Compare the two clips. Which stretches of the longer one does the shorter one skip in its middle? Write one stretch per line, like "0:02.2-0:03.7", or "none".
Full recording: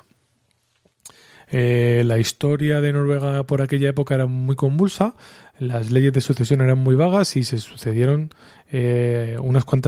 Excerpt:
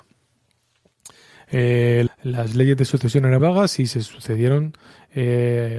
0:02.1-0:05.4
0:06.8-0:07.0